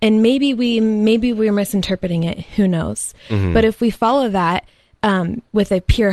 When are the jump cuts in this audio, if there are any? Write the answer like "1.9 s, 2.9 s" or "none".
none

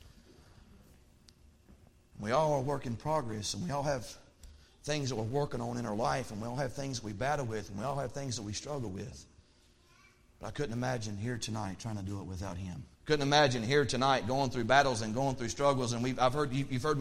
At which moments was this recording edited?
12.9 s

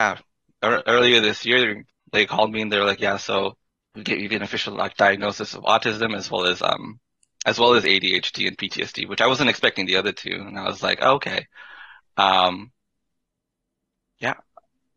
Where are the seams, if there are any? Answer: none

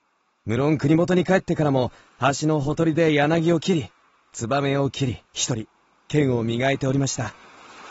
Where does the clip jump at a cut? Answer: 5.2 s

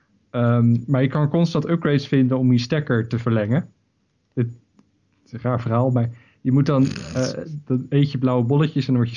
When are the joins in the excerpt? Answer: 7.7 s

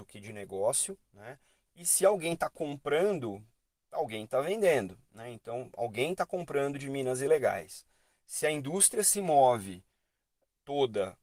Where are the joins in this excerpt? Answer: 1.7 s

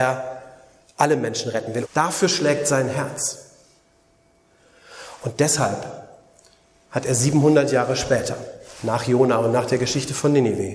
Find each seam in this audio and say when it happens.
1.8 s

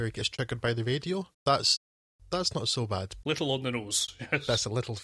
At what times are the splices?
1.3 s, 3.2 s

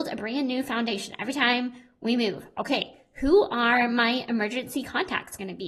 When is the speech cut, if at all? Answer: none

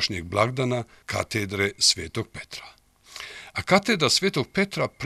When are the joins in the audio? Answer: none

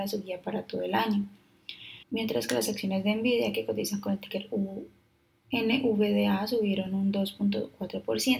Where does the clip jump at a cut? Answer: 2.0 s

